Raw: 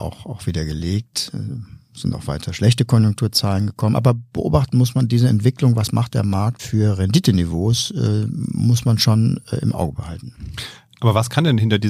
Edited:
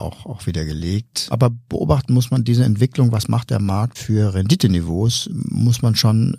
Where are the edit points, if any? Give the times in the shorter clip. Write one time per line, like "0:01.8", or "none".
0:01.3
0:05.3